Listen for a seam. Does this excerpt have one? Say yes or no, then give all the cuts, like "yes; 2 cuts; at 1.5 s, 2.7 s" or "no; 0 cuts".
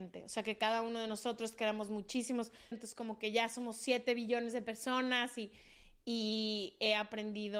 yes; 1 cut; at 2.7 s